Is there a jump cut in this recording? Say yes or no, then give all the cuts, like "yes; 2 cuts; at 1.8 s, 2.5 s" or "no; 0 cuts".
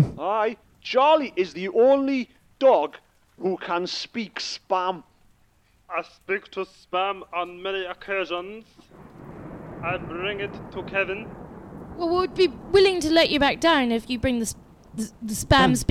no; 0 cuts